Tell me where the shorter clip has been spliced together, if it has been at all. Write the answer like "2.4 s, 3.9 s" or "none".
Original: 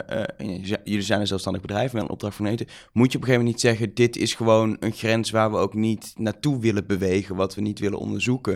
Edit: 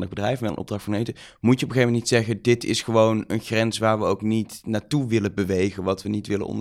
none